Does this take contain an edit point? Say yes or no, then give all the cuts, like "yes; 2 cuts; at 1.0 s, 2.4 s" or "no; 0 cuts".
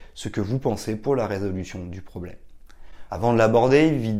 yes; 1 cut; at 3.1 s